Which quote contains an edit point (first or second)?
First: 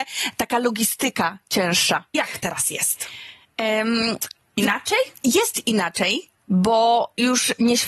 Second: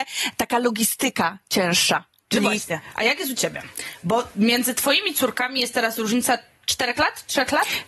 first